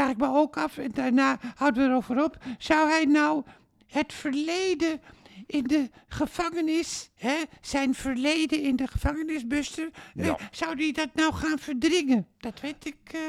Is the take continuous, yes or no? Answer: yes